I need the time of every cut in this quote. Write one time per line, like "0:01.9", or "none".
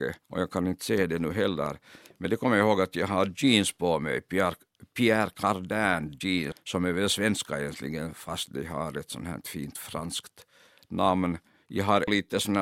0:06.5